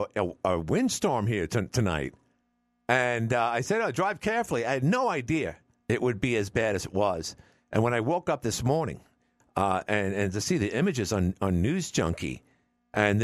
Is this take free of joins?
yes; 0 cuts

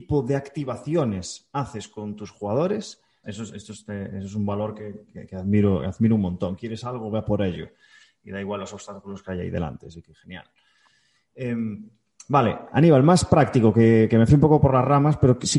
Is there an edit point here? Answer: yes; 1 cut; at 3.2 s

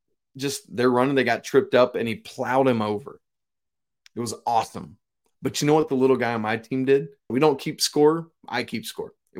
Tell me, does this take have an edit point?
yes; 1 cut; at 7.3 s

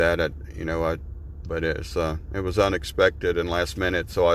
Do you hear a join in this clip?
yes; 1 cut; at 1.4 s

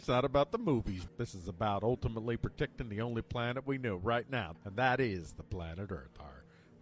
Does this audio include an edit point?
yes; 2 cuts; at 1.1 s, 4.5 s

